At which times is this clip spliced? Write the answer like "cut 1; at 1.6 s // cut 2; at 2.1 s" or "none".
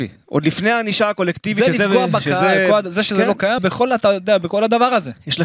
cut 1; at 3.6 s